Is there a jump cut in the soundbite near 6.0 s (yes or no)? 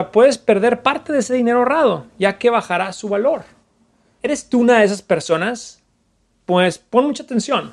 no